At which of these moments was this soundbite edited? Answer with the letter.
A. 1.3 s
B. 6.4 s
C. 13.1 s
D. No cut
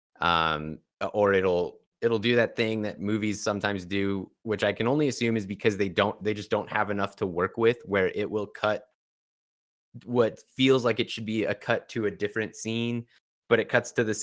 D